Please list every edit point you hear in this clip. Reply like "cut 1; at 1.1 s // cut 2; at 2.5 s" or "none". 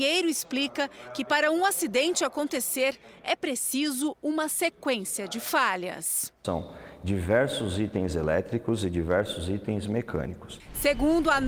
cut 1; at 6.4 s